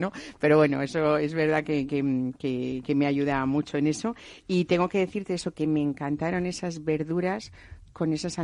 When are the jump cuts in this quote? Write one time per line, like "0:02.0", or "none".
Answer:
none